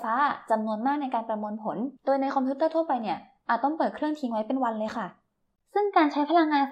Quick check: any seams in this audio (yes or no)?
yes